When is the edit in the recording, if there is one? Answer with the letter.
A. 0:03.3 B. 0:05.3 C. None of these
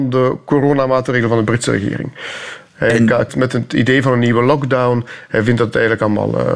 A